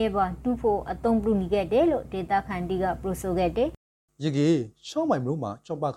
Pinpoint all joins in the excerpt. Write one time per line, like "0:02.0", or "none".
none